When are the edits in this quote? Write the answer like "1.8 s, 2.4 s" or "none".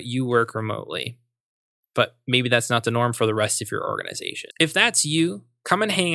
4.5 s

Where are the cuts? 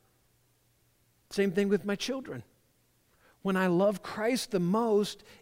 none

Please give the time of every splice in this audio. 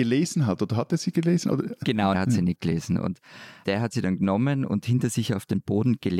2.1 s, 3.6 s

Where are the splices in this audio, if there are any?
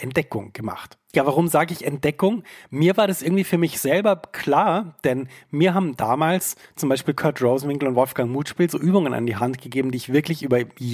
none

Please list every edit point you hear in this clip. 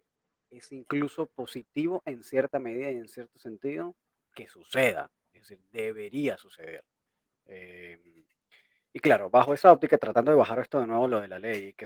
none

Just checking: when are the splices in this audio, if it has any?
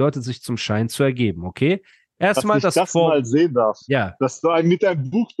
none

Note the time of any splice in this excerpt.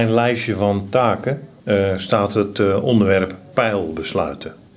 none

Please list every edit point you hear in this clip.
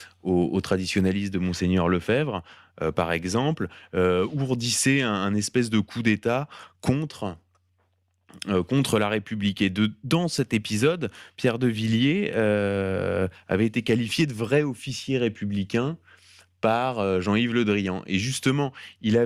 none

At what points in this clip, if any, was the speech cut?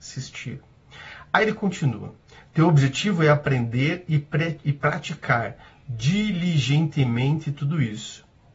none

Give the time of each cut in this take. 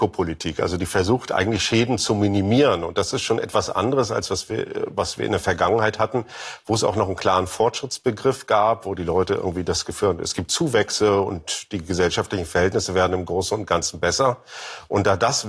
none

